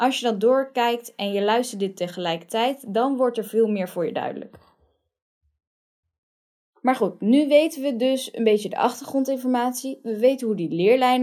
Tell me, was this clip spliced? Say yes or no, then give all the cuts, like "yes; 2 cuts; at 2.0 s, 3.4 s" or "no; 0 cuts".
no; 0 cuts